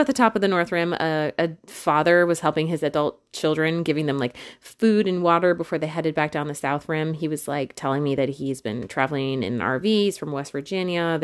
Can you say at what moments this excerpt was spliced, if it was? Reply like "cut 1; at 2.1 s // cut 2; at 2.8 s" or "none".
none